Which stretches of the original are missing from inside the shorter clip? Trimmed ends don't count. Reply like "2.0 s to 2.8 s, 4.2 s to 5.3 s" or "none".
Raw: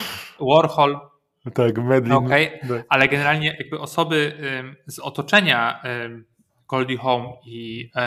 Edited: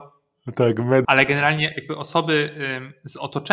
2.0 s to 2.9 s